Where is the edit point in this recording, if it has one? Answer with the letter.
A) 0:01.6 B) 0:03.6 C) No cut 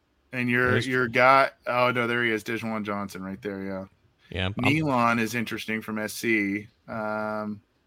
C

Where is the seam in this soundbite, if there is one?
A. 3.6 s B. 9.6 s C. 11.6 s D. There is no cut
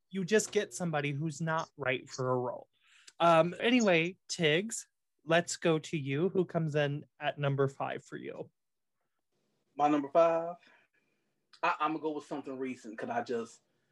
A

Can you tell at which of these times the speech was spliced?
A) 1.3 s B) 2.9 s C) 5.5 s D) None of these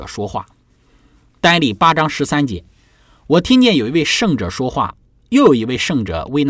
D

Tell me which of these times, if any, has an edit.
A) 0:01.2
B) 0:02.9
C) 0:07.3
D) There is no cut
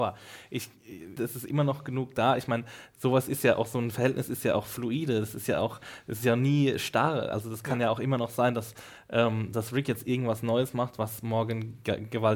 A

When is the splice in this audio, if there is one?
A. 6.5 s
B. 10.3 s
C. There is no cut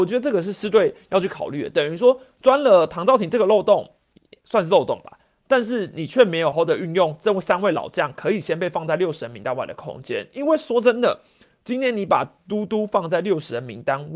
A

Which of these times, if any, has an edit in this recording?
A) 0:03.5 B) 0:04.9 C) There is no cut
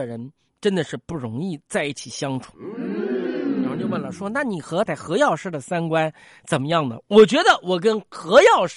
B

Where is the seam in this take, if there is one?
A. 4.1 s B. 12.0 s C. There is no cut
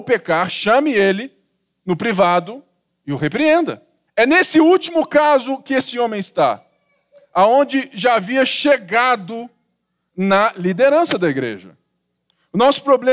A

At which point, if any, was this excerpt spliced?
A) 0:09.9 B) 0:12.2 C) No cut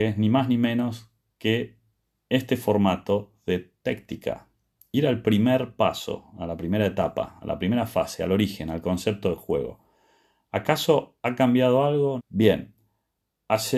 B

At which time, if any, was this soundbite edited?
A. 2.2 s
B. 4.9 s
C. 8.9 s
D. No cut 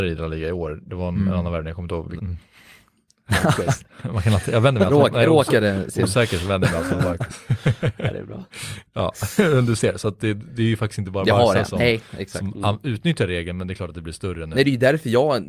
A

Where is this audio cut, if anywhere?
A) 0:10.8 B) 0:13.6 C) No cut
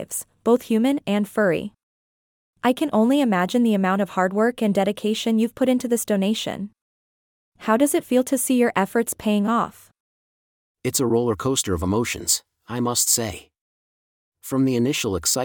C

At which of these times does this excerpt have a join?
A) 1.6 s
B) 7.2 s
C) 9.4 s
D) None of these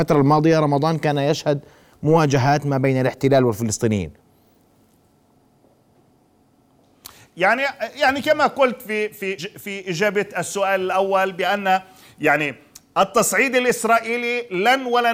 C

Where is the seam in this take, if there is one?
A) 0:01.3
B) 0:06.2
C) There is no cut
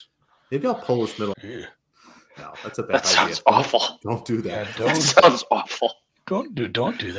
A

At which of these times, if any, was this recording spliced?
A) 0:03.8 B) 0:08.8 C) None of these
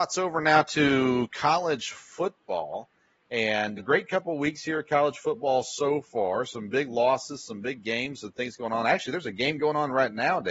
A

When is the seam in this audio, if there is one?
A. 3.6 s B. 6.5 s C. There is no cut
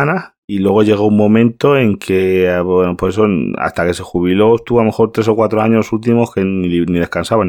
C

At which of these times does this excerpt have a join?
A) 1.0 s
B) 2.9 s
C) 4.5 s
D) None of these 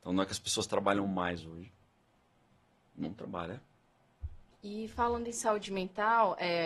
C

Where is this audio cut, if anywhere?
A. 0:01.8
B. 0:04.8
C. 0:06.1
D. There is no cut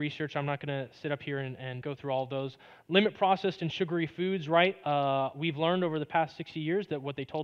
A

